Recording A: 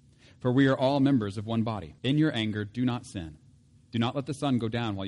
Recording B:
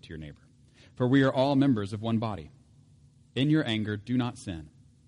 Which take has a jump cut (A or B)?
A